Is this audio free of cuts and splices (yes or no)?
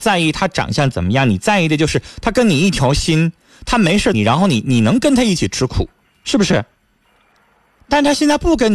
no